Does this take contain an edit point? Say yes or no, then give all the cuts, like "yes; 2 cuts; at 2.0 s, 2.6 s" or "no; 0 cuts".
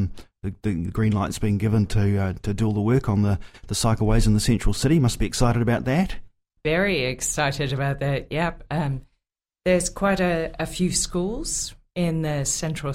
no; 0 cuts